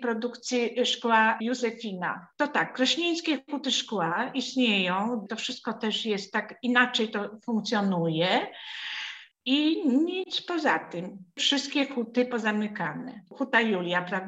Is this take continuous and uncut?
yes; 0 cuts

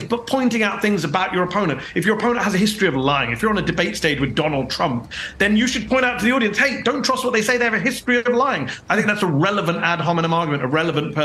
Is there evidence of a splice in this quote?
no; 0 cuts

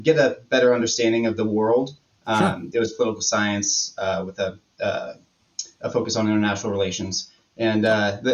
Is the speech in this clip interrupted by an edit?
no; 0 cuts

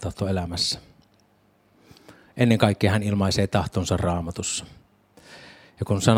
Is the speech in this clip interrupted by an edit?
no; 0 cuts

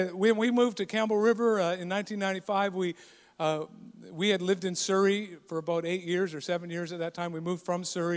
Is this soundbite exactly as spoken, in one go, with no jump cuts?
yes; 0 cuts

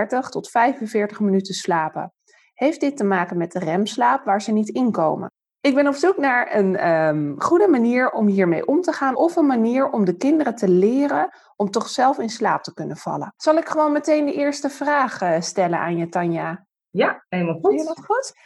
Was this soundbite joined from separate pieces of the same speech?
yes; 2 cuts; at 9.1 s, 13.4 s

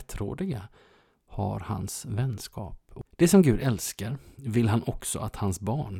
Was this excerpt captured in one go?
no; 1 cut; at 3.0 s

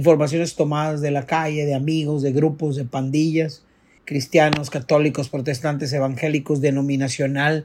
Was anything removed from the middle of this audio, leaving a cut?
yes; 1 cut; at 4.0 s

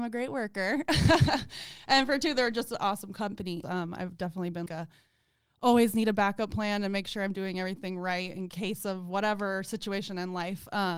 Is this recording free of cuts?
no; 2 cuts; at 3.6 s, 4.7 s

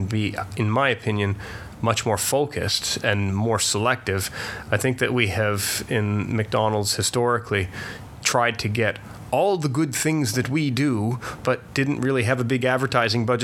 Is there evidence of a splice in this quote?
no; 0 cuts

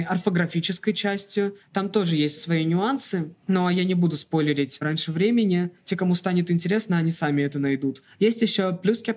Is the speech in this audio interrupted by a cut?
no; 0 cuts

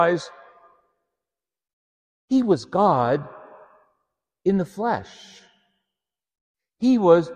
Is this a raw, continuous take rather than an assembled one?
yes; 0 cuts

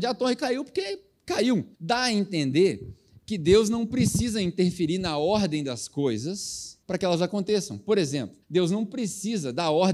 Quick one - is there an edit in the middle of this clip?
yes; 3 cuts; at 1.7 s, 6.8 s, 8.4 s

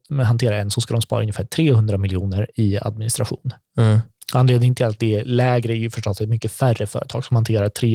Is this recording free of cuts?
yes; 0 cuts

